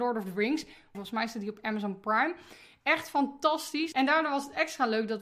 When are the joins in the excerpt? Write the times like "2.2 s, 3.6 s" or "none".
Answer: 0.9 s, 3.9 s